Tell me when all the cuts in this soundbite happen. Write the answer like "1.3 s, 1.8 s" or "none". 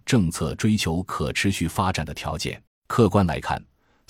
2.7 s